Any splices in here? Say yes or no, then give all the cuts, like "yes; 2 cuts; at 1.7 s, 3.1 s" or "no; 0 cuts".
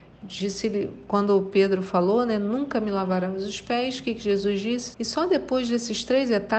yes; 1 cut; at 4.9 s